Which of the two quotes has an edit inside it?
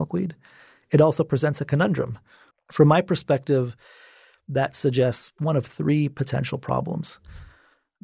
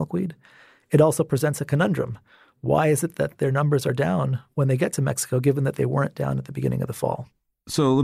first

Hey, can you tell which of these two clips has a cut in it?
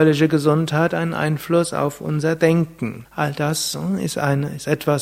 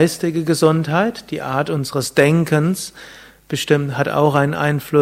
first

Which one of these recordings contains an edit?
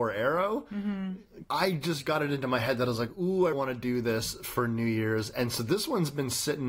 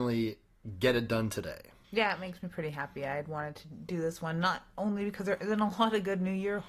first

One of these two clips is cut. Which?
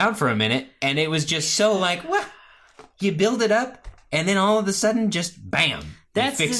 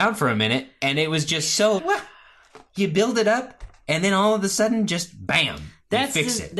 second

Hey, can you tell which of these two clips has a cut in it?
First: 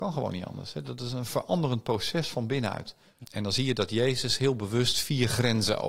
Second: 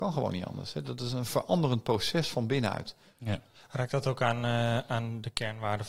first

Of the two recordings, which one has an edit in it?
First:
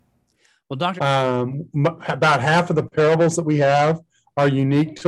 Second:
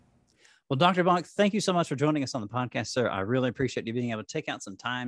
first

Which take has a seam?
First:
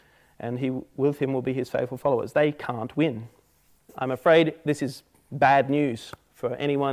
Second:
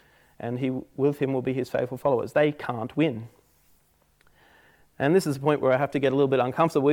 first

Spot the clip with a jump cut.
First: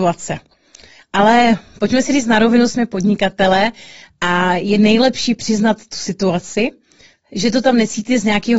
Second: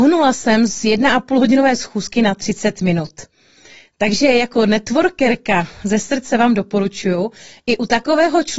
first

